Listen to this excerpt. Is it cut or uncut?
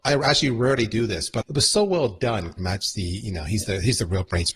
cut